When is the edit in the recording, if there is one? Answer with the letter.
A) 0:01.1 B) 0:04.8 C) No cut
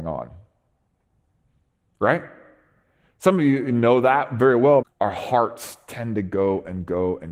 B